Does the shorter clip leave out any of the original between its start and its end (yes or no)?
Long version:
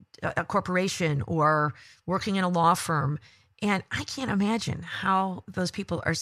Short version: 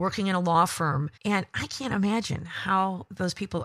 yes